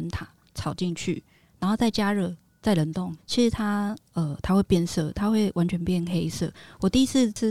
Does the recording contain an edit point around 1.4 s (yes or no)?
no